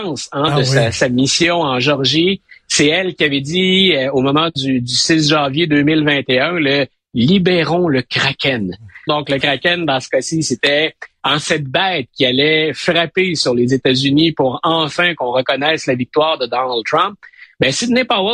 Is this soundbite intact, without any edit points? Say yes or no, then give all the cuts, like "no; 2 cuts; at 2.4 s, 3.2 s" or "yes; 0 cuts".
no; 1 cut; at 9.1 s